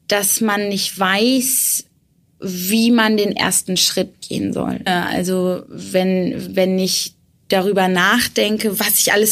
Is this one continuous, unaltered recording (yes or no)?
no